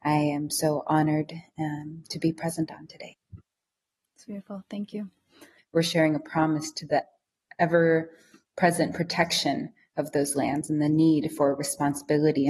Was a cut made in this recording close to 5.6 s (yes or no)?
yes